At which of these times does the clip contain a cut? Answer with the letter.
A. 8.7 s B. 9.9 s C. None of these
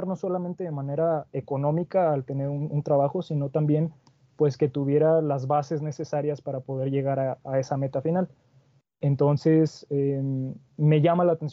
C